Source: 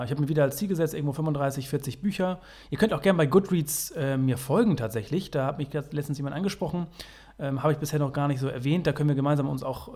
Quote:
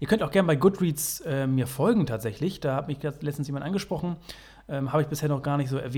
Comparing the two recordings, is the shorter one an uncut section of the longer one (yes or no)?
yes